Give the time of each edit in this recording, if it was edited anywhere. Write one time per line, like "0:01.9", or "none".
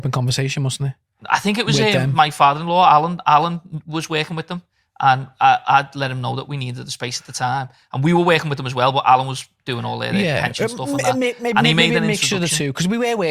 none